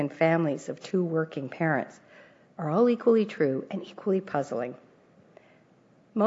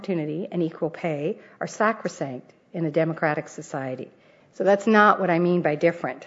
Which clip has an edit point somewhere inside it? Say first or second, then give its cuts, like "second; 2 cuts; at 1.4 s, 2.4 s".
second; 1 cut; at 4.4 s